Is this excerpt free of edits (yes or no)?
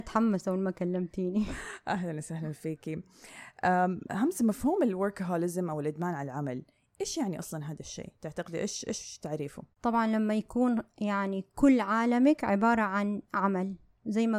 no